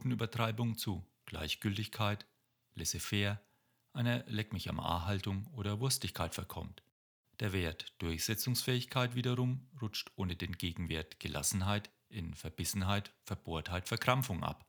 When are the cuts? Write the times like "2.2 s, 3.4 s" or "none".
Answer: none